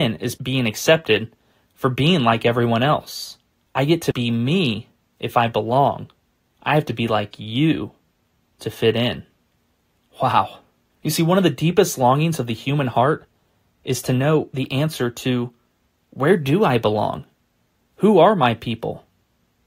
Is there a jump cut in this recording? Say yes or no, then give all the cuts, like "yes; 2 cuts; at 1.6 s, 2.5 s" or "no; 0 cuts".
yes; 1 cut; at 10.9 s